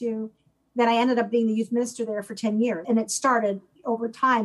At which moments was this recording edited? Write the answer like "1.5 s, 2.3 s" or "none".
2.8 s